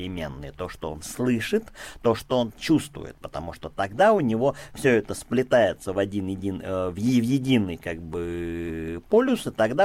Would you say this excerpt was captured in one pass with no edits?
no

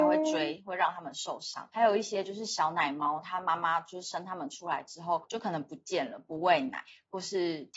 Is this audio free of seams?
yes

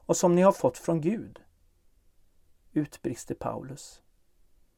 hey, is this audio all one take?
yes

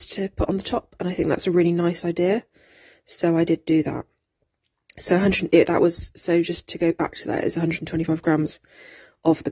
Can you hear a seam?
no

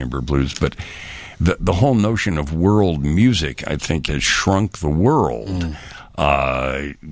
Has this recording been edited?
yes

